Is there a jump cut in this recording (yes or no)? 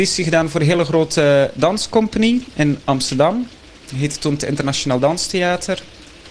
no